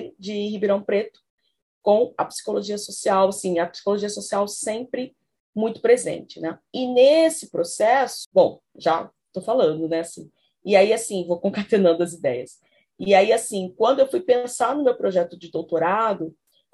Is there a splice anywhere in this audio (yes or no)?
no